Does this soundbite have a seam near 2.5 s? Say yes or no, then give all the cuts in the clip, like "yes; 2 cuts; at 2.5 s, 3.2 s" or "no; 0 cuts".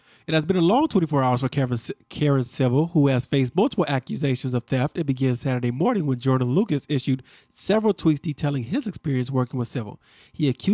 no; 0 cuts